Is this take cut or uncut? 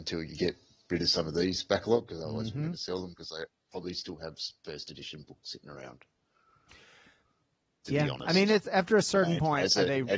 uncut